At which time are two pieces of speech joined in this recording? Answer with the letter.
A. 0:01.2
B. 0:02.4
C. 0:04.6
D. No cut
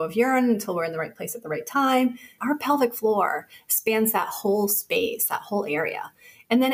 B